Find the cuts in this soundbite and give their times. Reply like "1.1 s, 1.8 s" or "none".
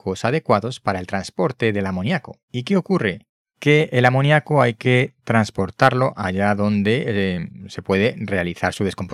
2.5 s